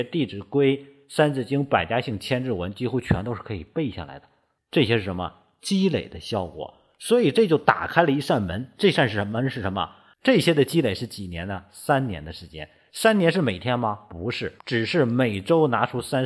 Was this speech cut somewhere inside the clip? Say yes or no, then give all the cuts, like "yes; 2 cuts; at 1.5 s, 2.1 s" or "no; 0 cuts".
yes; 3 cuts; at 4.6 s, 10.1 s, 14.6 s